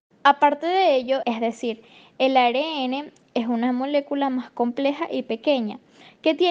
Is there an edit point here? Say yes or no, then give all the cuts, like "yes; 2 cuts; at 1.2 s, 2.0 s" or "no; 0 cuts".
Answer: yes; 1 cut; at 1.2 s